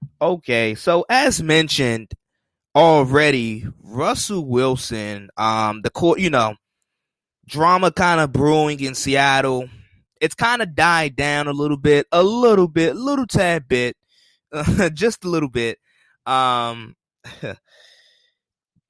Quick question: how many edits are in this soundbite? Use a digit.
0